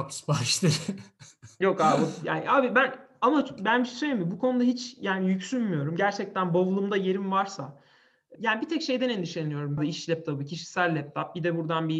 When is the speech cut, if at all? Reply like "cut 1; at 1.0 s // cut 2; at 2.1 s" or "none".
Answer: cut 1; at 8.4 s // cut 2; at 9.8 s

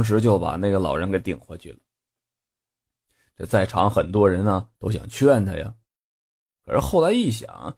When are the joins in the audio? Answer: none

